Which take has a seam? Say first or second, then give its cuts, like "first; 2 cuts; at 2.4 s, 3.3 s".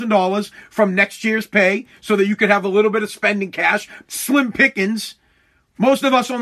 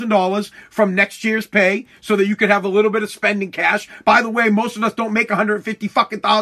first; 1 cut; at 4.1 s